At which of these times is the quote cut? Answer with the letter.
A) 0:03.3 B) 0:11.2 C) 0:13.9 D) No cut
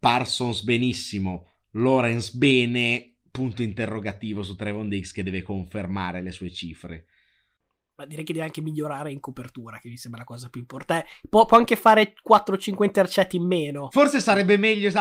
D